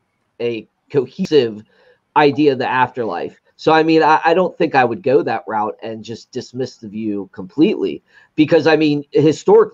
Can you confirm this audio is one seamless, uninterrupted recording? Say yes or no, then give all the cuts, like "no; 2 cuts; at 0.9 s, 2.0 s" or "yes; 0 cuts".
no; 1 cut; at 3.5 s